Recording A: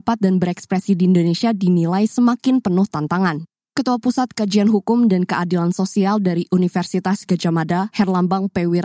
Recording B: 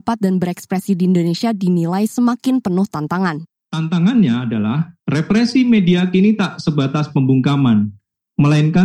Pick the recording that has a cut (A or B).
B